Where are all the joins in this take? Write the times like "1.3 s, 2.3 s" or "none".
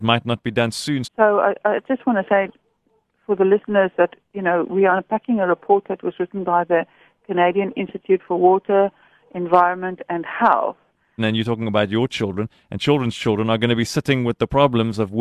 1.0 s, 11.2 s